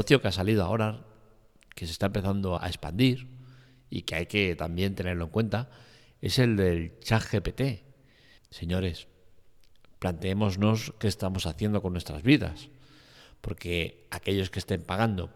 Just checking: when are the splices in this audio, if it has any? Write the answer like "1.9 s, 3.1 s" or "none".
2.6 s, 8.4 s